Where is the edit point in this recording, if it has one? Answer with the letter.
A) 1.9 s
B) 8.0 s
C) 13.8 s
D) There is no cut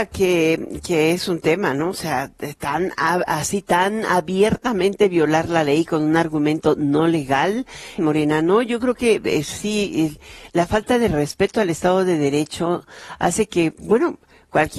B